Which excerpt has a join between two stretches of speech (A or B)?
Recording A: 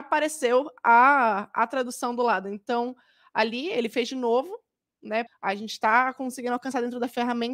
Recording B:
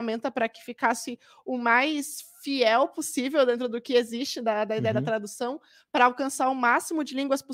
A